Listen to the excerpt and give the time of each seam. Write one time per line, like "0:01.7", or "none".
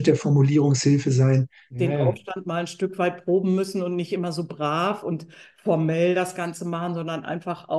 0:01.7